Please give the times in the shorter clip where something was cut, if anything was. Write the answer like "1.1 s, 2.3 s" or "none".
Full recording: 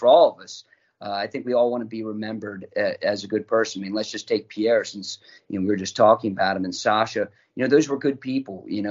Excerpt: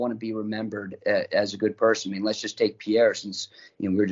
none

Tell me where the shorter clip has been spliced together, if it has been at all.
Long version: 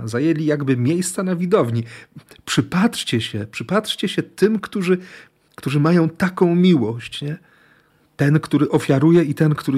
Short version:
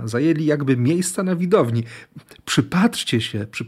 none

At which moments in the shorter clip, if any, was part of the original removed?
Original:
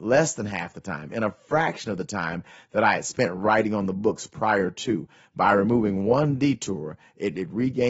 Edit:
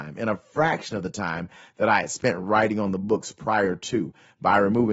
none

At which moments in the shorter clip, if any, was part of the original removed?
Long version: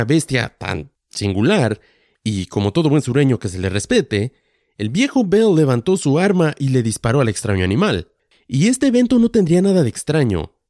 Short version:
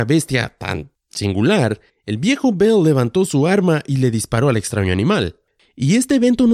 1.9 s

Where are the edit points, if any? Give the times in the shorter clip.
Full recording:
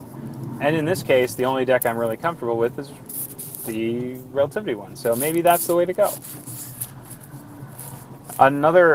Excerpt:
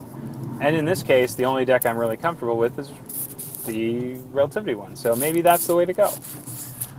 none

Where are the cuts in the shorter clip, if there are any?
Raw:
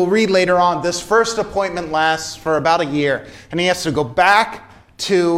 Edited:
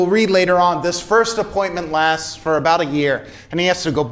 none

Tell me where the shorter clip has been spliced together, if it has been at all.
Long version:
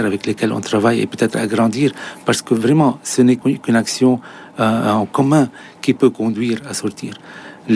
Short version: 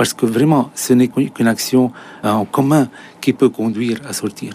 2.2 s

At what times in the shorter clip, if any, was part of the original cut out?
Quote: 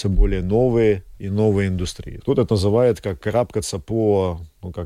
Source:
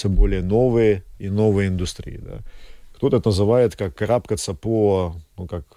2.2 s

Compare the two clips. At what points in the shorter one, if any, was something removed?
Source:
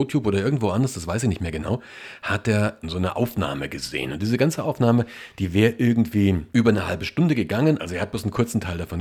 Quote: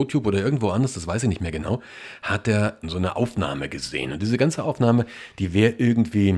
none

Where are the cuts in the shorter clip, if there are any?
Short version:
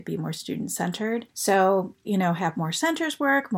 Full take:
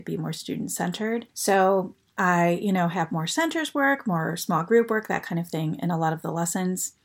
2.0 s

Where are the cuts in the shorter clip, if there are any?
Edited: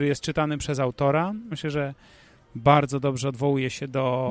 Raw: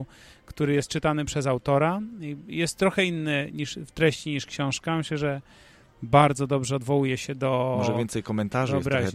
1.5 s

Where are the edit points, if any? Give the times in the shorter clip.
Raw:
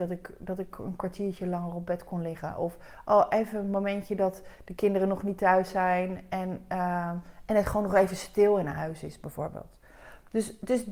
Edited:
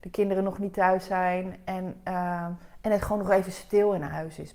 none

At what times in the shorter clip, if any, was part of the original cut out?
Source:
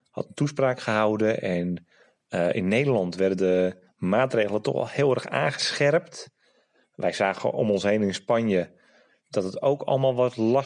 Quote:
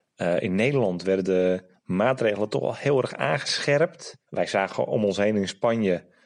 4.2 s

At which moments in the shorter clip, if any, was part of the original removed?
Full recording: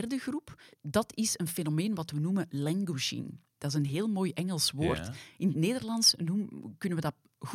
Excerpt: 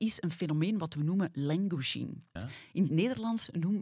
2.4 s

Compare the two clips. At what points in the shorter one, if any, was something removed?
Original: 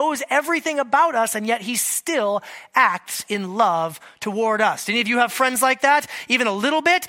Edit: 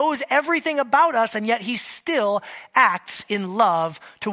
none

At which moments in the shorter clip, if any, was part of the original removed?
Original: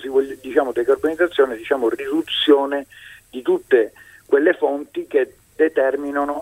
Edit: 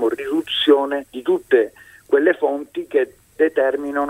1.1 s

